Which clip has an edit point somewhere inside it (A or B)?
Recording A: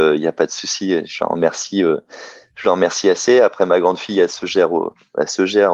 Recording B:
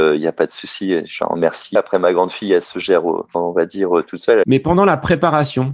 B